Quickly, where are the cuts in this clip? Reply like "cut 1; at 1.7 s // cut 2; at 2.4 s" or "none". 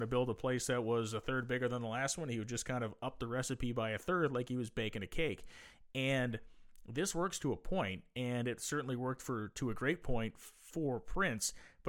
none